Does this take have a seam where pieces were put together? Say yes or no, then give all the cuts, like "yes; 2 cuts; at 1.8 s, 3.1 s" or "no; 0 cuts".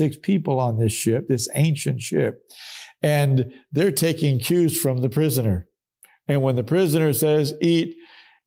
no; 0 cuts